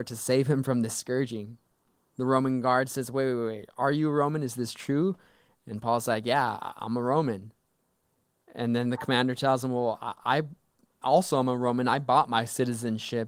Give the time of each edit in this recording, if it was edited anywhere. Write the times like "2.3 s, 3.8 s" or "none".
none